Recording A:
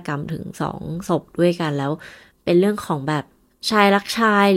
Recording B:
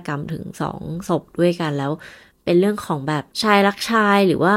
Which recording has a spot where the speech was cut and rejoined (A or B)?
B